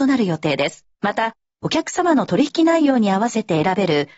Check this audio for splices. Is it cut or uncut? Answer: cut